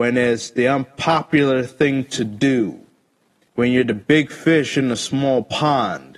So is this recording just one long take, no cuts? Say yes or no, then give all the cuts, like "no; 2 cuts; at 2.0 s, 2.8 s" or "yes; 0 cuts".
no; 1 cut; at 3.5 s